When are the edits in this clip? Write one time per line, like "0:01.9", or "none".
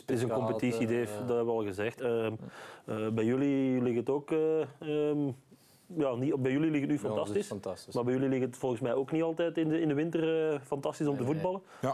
0:02.0